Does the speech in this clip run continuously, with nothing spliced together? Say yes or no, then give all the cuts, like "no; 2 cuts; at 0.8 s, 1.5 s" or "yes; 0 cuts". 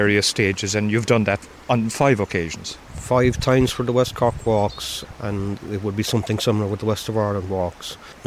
yes; 0 cuts